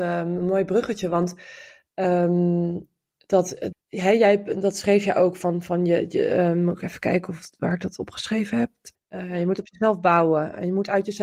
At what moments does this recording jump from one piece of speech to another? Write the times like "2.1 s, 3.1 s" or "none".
3.7 s, 8.9 s